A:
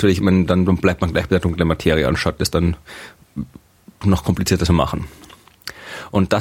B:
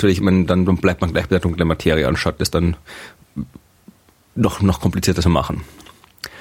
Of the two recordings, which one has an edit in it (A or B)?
A